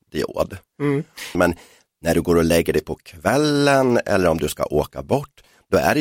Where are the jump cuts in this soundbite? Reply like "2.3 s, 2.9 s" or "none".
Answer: 1.3 s